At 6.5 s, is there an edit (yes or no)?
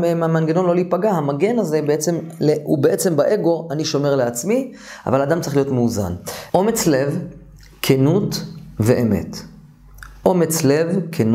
yes